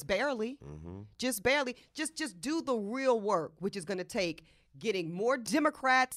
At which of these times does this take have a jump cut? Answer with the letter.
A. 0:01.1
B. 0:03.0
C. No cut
C